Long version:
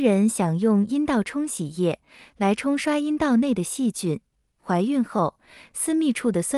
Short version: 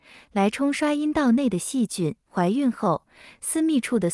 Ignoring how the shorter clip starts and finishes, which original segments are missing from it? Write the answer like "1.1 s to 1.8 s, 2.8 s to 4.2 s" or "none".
4.3 s to 4.5 s